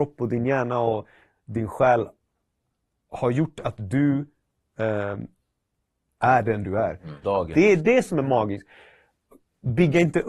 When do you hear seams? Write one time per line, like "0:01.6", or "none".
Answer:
0:07.2

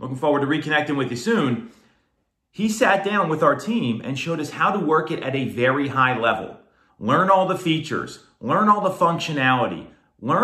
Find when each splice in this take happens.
0:06.9

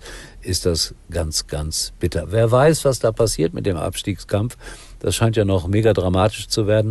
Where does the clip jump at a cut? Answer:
none

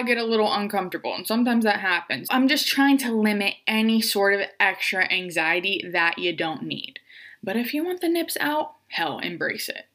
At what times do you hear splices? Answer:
none

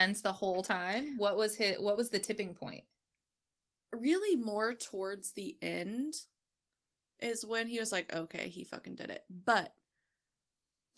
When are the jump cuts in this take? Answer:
none

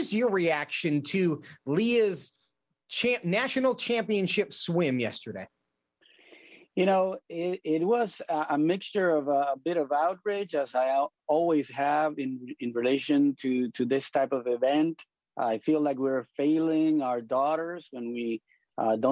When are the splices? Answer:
none

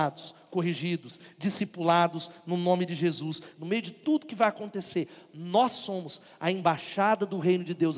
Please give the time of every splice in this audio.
0:03.6

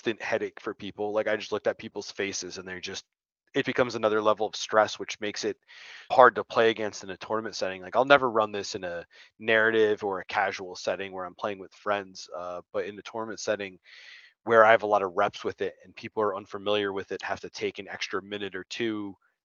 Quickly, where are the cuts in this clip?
0:03.6
0:06.1

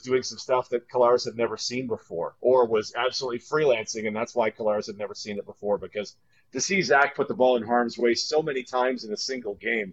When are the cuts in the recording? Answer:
none

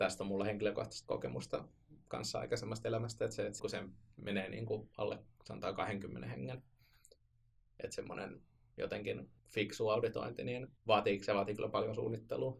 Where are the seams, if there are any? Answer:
0:03.6
0:09.4
0:10.8

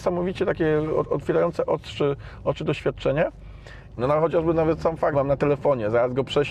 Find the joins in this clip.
0:04.0
0:05.1

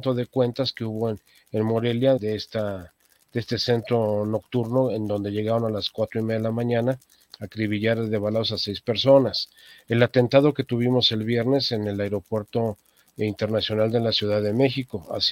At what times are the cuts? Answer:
0:02.2

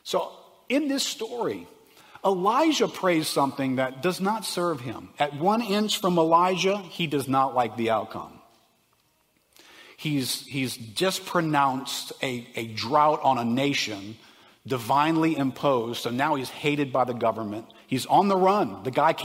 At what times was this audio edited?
none

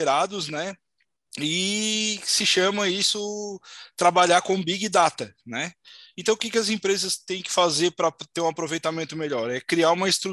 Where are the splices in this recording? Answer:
0:06.1

